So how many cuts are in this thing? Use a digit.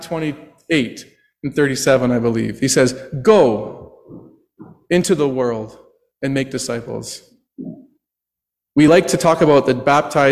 0